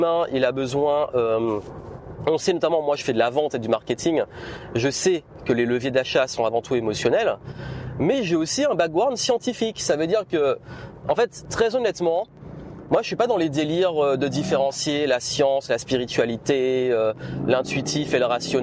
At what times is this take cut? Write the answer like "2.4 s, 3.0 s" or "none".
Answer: none